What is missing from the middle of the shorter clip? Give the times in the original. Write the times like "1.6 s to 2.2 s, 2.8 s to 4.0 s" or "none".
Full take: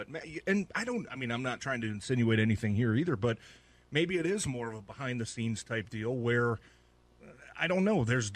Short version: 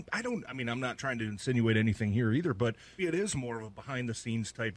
3.6 s to 4.1 s